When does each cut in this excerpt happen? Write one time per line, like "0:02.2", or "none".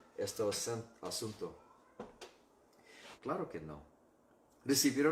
0:03.1